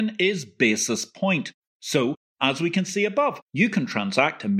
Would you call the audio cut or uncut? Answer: cut